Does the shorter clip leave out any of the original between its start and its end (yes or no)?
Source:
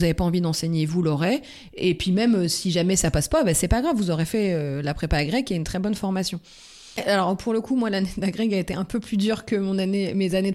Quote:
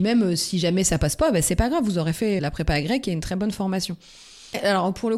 yes